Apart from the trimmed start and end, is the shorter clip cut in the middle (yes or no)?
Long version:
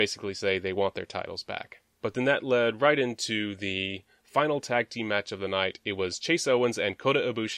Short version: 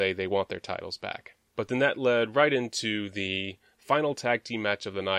no